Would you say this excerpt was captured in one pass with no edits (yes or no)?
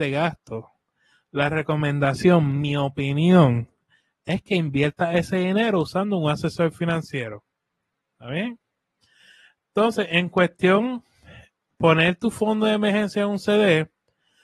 yes